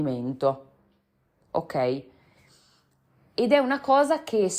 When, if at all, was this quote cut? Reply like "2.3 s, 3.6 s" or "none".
none

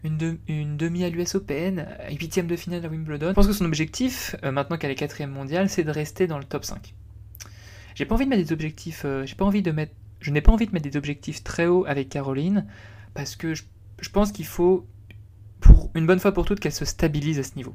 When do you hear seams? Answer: 3.3 s

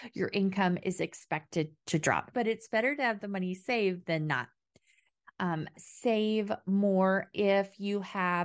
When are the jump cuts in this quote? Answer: 2.3 s, 5.7 s

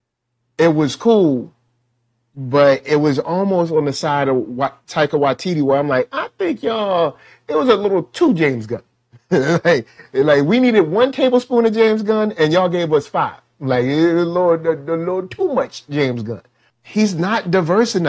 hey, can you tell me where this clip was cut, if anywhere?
16.7 s

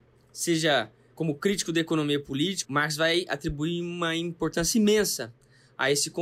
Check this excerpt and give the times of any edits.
1.2 s, 2.6 s

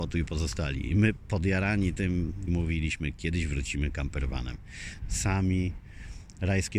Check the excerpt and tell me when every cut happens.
2.5 s, 5.0 s

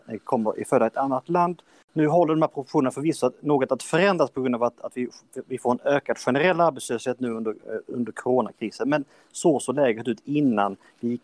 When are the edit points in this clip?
none

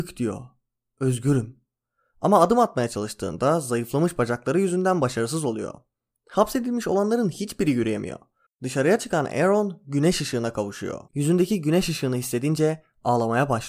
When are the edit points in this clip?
8.5 s, 11.1 s

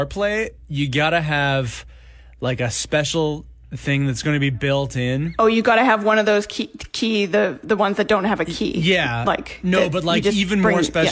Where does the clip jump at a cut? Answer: none

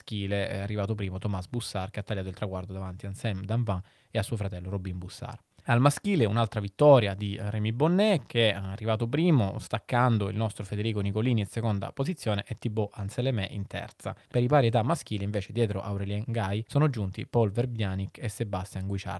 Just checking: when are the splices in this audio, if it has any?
5.6 s, 14.3 s

